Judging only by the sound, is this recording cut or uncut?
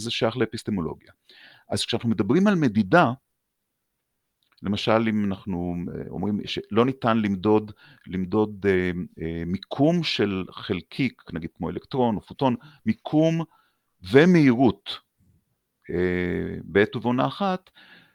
uncut